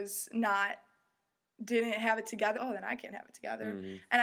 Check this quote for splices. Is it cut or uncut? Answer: cut